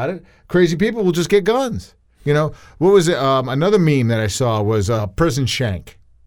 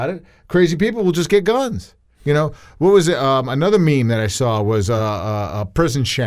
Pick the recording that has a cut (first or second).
first